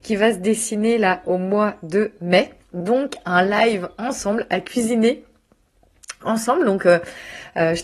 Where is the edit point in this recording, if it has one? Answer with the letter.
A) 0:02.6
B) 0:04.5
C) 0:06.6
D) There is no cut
A